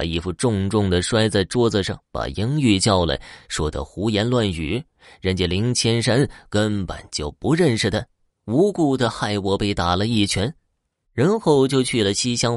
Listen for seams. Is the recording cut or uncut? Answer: cut